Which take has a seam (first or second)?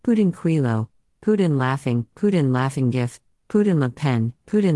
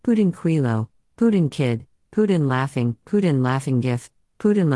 first